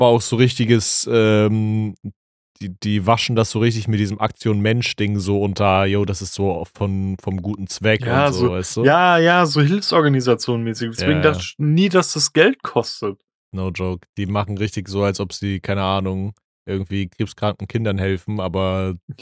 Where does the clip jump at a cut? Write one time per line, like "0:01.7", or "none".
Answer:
none